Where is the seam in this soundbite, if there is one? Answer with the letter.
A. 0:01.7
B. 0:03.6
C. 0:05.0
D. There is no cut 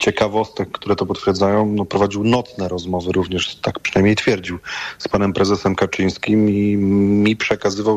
D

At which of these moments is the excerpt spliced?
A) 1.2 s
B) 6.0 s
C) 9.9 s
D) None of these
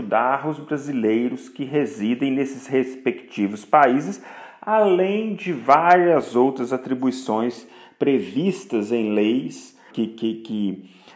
C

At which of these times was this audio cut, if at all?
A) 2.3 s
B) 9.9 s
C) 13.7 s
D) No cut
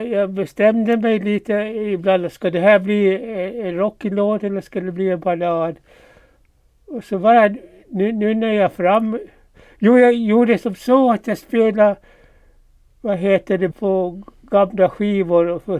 C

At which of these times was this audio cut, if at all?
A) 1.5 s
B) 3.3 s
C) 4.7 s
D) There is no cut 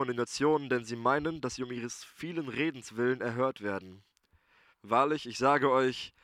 C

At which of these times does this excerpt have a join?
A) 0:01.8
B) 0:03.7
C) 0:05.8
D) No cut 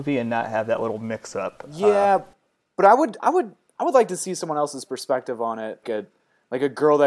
C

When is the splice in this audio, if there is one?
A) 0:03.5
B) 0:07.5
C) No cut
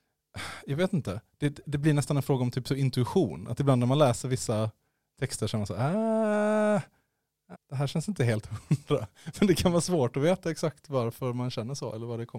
B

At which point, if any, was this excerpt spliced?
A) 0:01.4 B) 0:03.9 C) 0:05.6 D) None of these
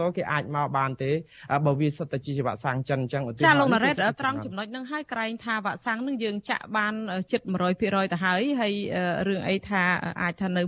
D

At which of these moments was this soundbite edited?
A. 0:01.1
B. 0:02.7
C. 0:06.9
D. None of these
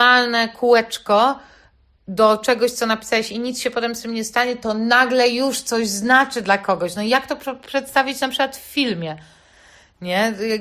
D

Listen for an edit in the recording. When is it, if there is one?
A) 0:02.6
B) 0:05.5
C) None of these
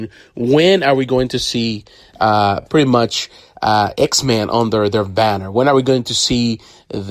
C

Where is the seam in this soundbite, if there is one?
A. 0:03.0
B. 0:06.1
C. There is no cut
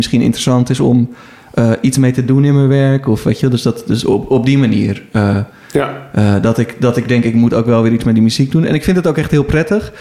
C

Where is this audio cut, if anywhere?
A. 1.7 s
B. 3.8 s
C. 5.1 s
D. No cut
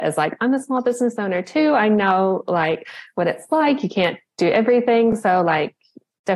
D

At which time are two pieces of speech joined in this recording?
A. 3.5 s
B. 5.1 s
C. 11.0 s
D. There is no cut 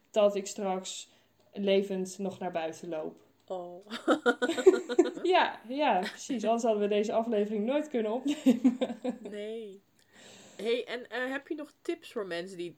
B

